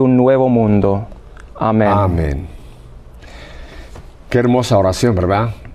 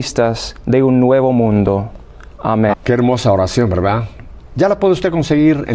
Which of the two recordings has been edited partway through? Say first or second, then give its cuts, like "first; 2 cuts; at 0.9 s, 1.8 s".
second; 1 cut; at 2.7 s